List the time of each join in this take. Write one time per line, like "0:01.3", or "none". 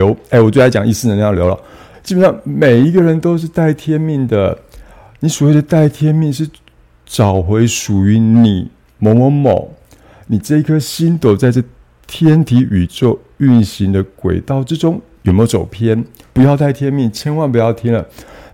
0:01.9
0:16.2